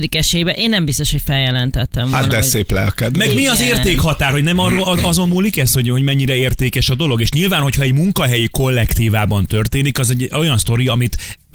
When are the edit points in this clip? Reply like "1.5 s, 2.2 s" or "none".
none